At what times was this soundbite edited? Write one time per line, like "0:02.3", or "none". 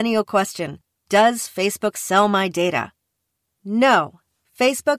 none